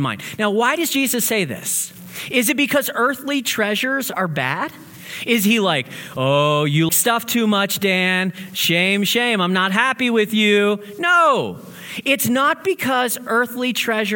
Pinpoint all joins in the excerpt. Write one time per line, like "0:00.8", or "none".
0:06.9

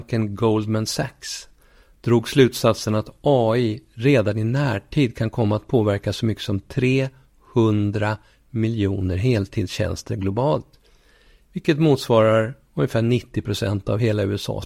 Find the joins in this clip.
none

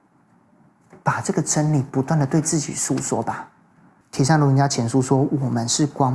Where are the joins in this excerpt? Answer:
0:04.0

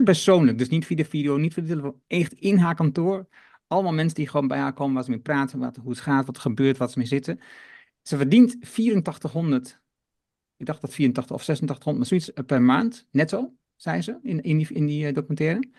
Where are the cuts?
none

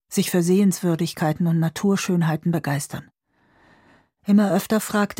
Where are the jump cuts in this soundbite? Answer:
none

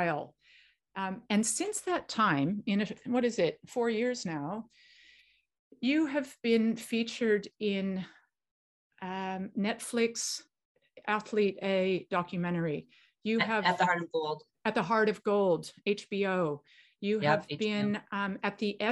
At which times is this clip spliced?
none

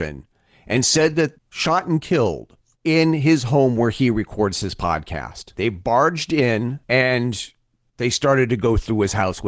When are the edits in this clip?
0:01.3
0:05.5

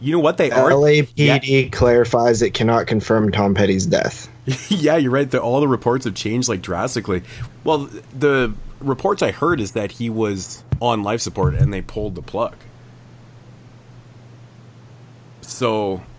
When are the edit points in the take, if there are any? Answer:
0:07.5

